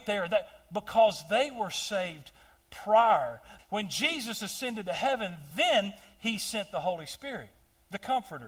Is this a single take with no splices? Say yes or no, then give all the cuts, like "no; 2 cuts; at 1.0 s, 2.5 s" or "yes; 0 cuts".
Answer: no; 2 cuts; at 3.6 s, 5.5 s